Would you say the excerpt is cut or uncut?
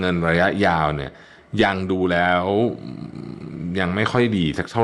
uncut